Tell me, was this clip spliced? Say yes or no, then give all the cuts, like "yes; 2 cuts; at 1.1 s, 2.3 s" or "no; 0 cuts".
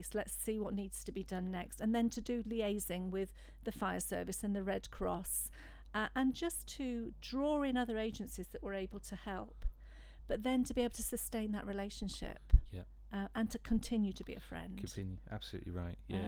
no; 0 cuts